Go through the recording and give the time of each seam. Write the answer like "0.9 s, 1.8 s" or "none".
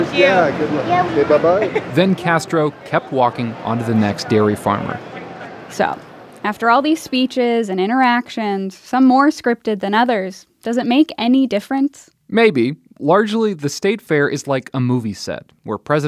1.1 s